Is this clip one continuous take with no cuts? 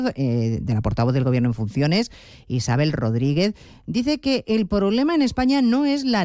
yes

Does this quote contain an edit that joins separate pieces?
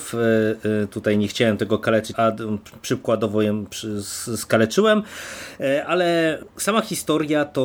yes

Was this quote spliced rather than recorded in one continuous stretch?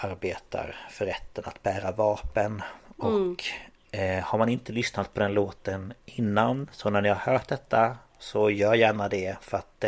no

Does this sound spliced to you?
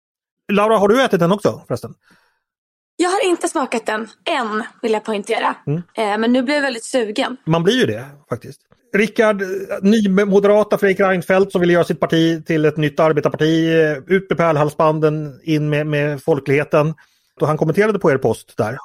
yes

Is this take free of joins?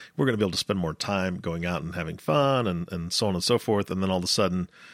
yes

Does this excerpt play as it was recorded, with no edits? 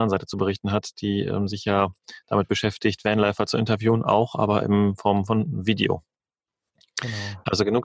yes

